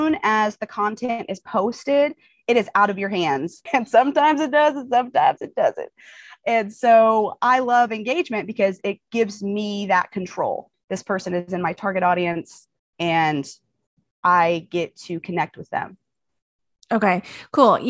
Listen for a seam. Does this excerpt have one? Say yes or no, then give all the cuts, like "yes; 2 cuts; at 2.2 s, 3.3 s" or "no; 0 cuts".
yes; 2 cuts; at 3.7 s, 10.7 s